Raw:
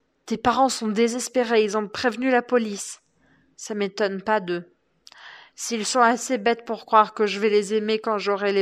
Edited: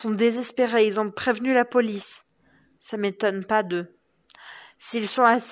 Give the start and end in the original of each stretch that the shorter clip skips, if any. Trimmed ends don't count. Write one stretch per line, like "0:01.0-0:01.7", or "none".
none

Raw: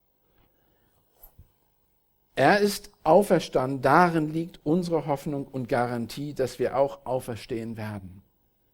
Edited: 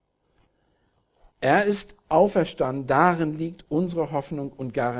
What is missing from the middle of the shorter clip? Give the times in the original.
0:01.3-0:02.3

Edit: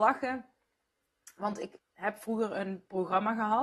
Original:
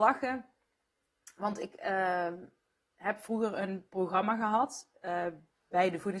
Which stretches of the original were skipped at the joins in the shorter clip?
0:01.8-0:02.8

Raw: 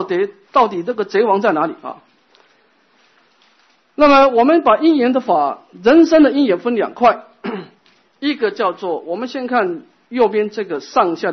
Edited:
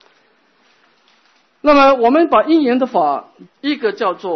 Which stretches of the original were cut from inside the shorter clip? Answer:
0:05.8-0:08.0

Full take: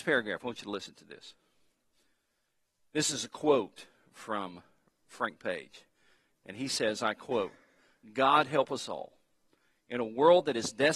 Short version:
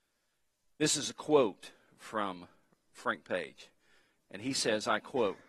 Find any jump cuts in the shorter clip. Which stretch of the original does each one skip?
none

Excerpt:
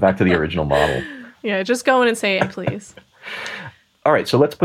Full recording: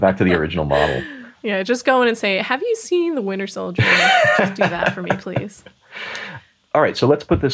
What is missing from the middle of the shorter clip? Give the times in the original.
0:02.4-0:05.1

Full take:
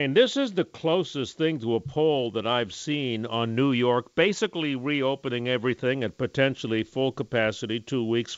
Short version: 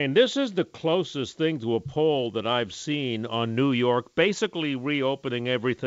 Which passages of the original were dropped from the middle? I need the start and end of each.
none

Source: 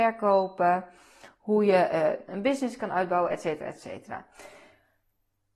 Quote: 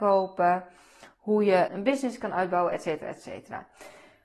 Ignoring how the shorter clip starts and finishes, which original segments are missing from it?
0:01.9-0:02.3

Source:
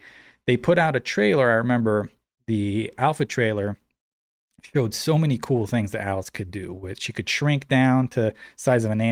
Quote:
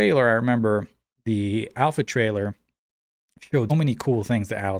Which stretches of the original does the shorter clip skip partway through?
0:04.9-0:05.1

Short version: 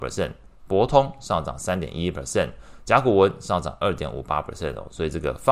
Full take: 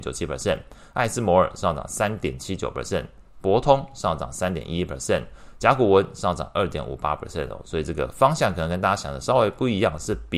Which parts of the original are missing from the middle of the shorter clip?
none

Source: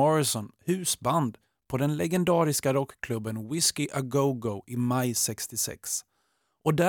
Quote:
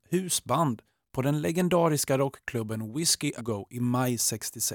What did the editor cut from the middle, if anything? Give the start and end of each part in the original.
0:03.9-0:04.3

